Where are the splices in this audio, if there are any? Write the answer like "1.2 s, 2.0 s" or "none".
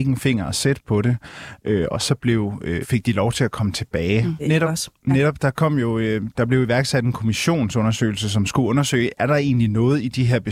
2.8 s, 4.4 s